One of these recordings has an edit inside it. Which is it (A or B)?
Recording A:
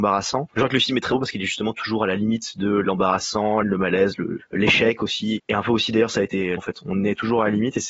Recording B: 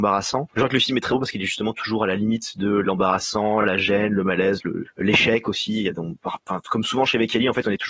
A